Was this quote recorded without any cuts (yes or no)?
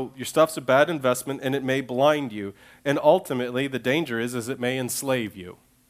yes